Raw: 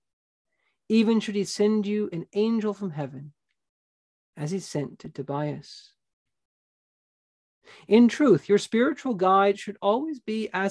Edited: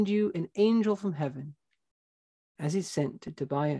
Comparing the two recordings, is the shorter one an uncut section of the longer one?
yes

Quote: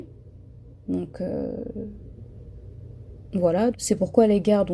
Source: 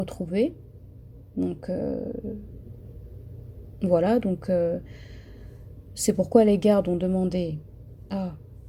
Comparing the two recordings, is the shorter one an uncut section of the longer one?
no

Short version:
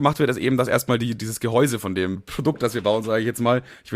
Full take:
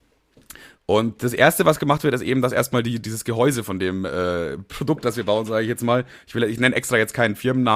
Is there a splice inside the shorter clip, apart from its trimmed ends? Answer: yes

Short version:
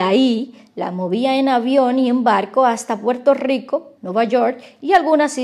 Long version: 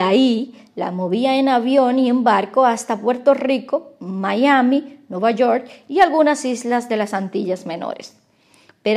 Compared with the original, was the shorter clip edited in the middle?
yes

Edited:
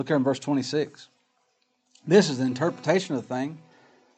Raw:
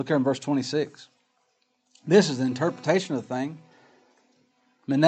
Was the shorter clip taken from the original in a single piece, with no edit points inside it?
yes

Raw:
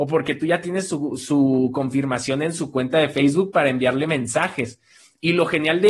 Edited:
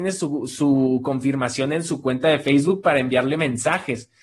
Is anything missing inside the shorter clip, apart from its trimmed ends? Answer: no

